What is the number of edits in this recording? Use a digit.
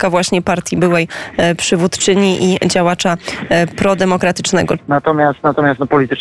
1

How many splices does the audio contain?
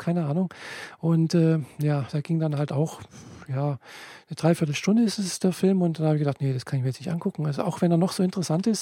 0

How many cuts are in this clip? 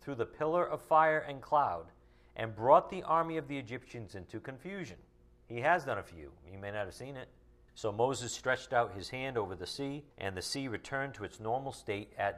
3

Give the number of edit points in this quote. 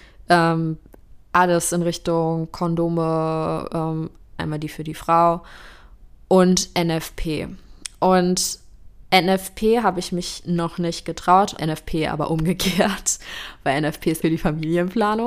3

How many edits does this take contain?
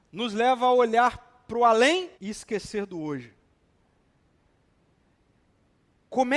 1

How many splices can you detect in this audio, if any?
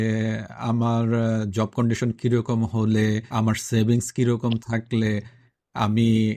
1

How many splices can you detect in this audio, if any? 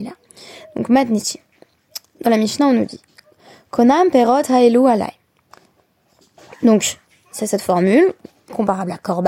1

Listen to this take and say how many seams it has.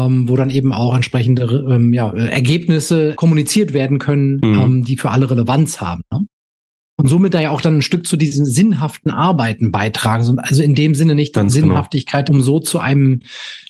1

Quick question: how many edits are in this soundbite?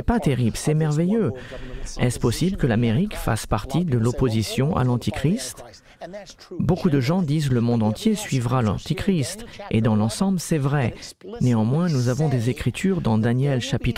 1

